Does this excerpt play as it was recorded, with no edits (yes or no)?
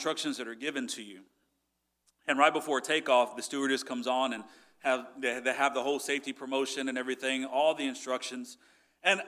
yes